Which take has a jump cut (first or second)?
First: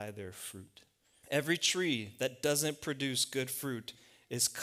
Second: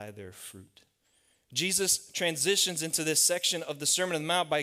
first